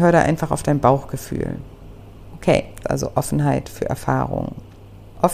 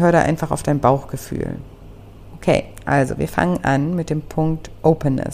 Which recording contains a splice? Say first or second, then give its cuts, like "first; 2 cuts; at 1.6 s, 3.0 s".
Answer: first; 1 cut; at 2.8 s